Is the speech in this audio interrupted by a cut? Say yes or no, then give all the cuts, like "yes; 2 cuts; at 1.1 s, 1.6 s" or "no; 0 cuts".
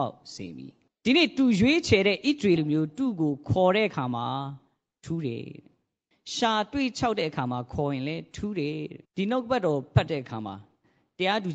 yes; 2 cuts; at 2.6 s, 9.0 s